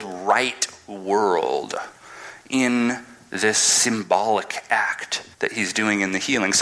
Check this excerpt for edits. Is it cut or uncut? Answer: cut